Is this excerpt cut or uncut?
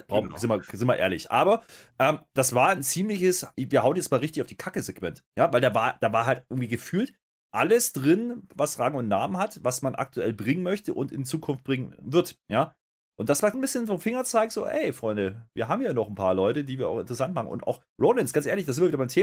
cut